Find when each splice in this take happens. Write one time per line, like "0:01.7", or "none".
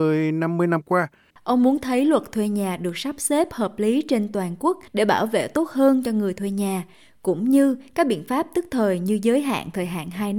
0:01.3
0:04.9